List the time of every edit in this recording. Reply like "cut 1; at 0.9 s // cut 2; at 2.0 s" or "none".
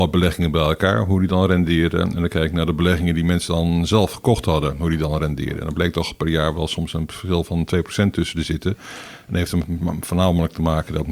none